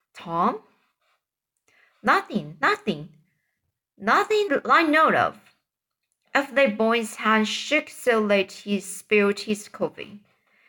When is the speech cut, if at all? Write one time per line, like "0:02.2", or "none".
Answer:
0:04.5